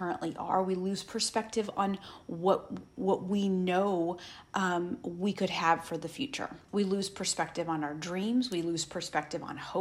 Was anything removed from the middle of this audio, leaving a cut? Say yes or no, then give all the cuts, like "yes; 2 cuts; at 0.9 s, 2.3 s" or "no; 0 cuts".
yes; 1 cut; at 6.7 s